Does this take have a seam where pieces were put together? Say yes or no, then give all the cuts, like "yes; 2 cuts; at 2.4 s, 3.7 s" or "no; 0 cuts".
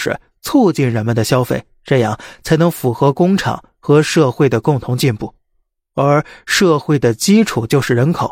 no; 0 cuts